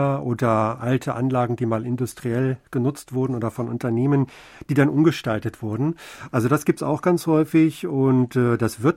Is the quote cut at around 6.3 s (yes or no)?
yes